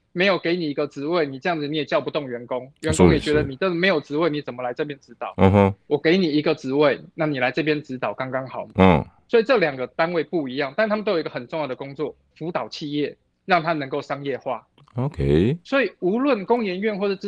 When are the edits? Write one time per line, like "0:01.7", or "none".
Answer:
0:08.7
0:12.3